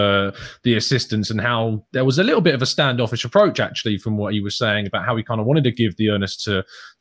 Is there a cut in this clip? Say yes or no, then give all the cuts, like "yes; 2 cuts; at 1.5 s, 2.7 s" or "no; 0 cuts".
no; 0 cuts